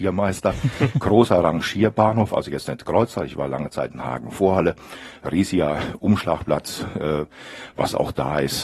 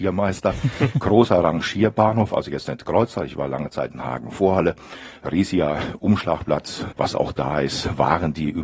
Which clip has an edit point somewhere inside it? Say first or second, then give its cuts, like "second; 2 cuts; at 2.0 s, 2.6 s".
second; 1 cut; at 6.9 s